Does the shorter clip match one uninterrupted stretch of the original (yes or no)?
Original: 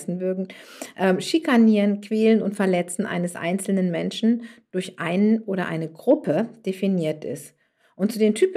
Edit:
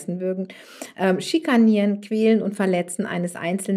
yes